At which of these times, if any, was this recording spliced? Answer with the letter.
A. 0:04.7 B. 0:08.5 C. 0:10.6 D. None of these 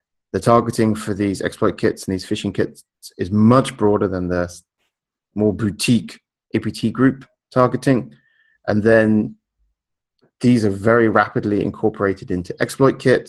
B